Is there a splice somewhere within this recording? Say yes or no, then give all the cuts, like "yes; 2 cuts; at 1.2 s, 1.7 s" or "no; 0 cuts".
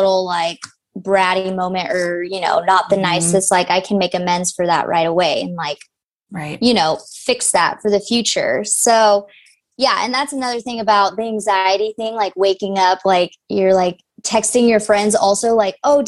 no; 0 cuts